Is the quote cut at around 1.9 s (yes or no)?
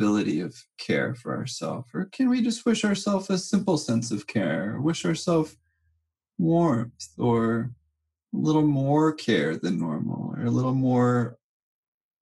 no